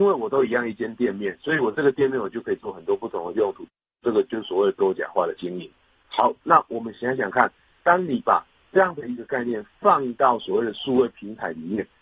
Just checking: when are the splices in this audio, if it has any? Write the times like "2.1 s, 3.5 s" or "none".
none